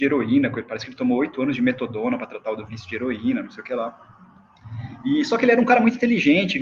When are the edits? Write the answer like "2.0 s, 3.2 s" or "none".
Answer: none